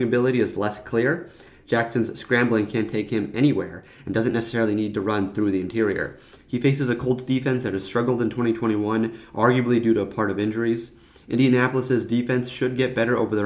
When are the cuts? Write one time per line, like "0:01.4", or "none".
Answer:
0:06.4